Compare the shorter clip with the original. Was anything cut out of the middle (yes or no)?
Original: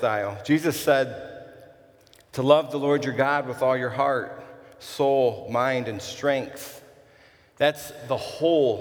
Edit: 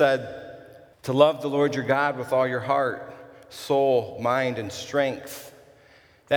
yes